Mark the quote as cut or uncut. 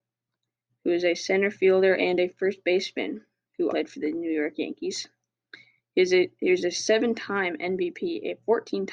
cut